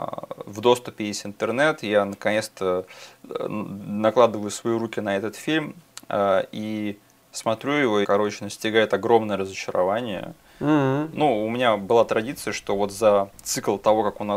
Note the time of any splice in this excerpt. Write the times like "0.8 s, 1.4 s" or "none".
8.0 s, 11.2 s